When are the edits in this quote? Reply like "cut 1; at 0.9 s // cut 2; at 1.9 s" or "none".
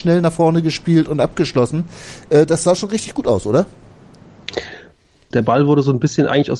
cut 1; at 5.3 s